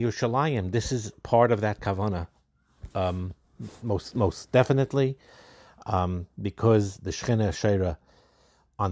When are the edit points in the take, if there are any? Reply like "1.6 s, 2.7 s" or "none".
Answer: none